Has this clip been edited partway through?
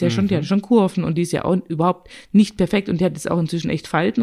no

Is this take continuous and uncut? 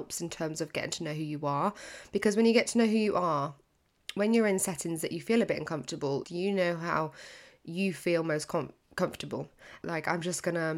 no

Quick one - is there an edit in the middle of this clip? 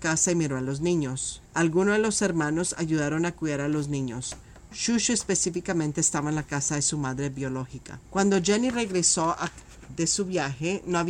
no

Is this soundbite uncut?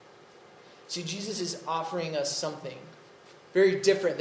yes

